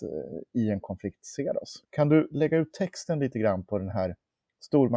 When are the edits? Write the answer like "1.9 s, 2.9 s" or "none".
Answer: 1.8 s

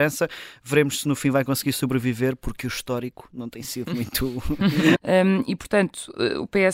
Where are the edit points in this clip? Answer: 4.9 s

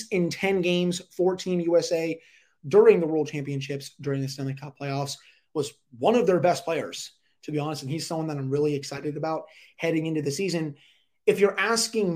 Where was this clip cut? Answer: none

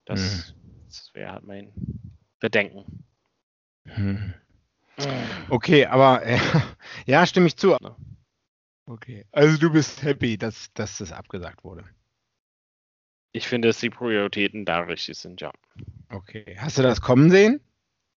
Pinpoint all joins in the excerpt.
7.8 s

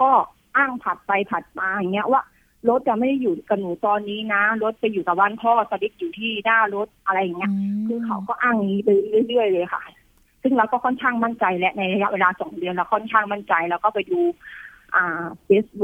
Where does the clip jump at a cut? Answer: none

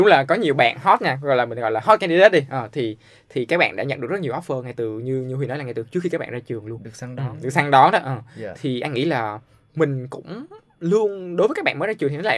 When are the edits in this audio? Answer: none

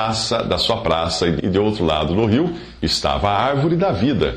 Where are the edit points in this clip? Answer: 1.4 s

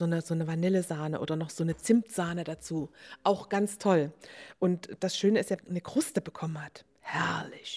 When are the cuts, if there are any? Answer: 5.6 s

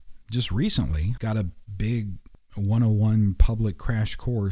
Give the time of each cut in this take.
1.2 s

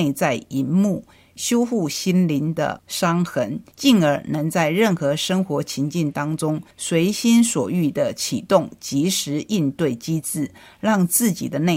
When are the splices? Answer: 6.7 s

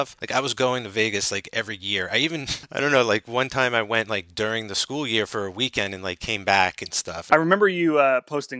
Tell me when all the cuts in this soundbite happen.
7.3 s

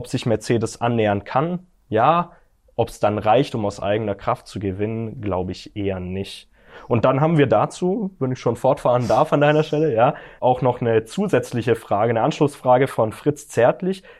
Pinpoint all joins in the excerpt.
10.4 s

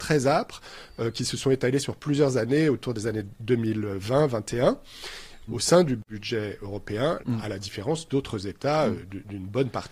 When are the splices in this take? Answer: 5.5 s, 7.2 s

